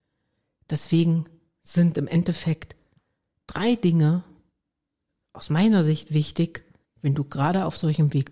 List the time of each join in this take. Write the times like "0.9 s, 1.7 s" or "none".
6.8 s